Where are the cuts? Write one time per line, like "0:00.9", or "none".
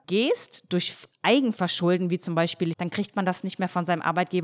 0:02.7